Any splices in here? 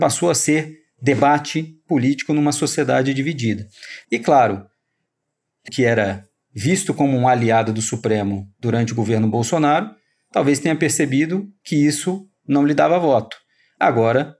yes; 2 cuts; at 4.0 s, 5.7 s

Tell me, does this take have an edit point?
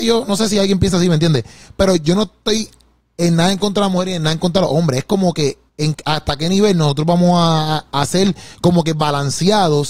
yes; 2 cuts; at 5.7 s, 7.9 s

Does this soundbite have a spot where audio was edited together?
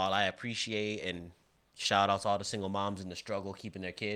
no; 0 cuts

